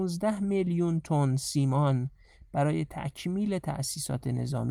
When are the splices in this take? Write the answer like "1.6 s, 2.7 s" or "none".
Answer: none